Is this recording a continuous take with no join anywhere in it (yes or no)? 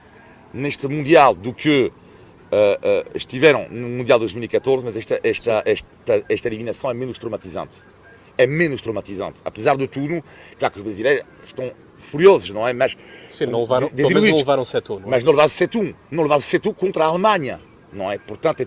yes